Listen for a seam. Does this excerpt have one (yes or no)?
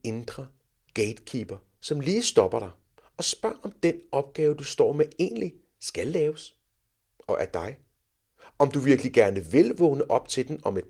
no